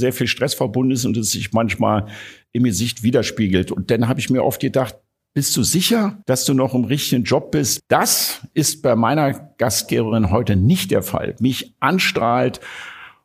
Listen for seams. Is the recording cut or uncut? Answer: cut